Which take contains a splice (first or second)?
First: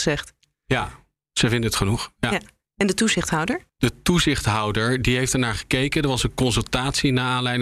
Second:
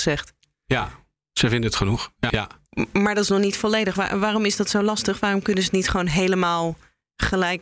second